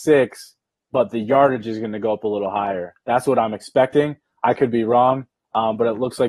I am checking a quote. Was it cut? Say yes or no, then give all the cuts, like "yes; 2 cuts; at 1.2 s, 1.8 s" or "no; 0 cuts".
no; 0 cuts